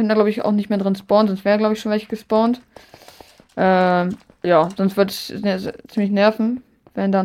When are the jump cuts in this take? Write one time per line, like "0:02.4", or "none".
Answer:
0:04.4